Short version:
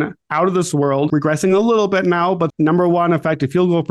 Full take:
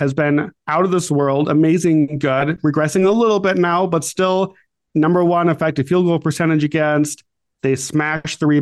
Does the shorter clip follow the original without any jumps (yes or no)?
no